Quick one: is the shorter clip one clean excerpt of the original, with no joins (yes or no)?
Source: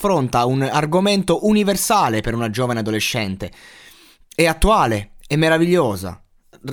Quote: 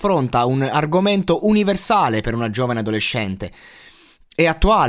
yes